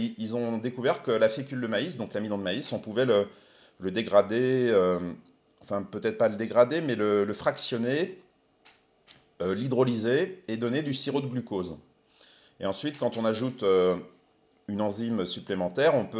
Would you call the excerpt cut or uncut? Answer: uncut